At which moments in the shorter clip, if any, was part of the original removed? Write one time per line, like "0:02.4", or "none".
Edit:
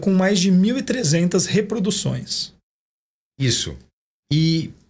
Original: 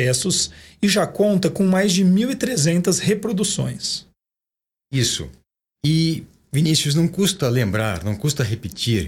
none